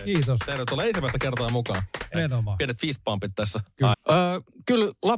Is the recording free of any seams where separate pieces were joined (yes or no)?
no